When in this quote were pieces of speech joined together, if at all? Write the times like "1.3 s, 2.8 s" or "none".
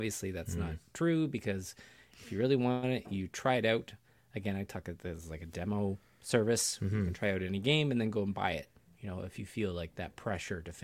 none